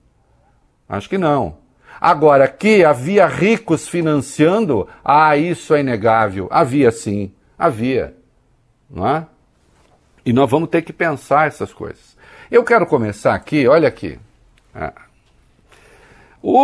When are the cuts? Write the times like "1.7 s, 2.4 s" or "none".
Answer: none